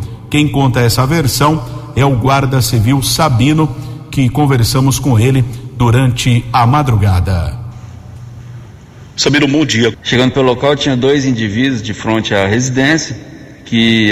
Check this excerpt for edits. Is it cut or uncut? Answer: cut